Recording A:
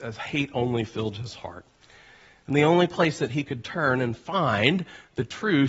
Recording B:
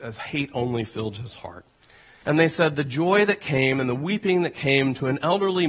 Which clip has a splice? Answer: B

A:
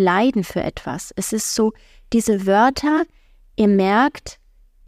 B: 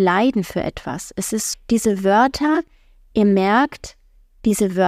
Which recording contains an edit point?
B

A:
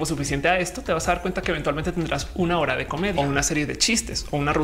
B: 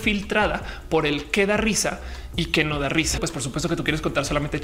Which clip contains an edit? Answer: B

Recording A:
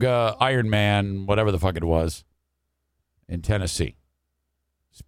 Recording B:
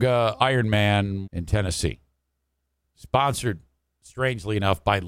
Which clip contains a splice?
B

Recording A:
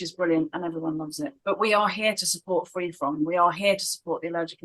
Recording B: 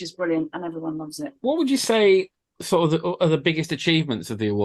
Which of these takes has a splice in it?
A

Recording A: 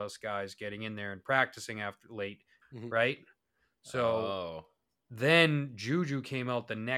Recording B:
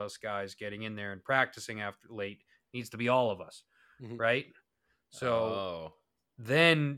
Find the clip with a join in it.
A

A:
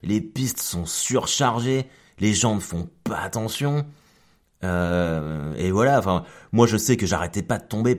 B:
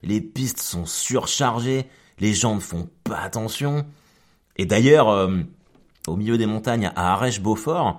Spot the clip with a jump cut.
B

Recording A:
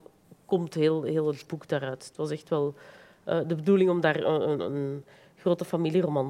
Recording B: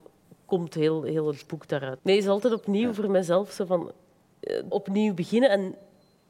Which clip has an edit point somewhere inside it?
B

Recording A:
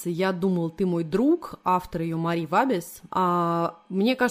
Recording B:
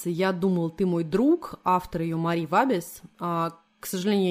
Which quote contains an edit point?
A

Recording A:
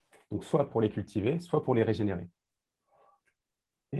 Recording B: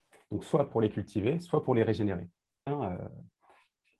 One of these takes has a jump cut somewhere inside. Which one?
B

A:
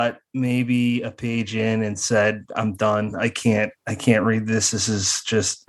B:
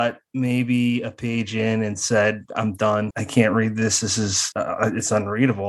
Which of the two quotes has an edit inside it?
B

